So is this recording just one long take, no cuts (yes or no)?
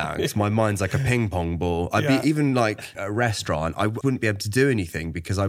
no